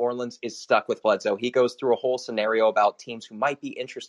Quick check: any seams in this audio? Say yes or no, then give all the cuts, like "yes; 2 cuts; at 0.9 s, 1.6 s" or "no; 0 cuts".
no; 0 cuts